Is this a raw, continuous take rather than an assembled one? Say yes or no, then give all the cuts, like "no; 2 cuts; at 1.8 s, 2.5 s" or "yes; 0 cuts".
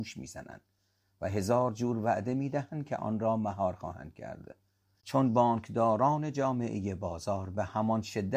no; 1 cut; at 4.9 s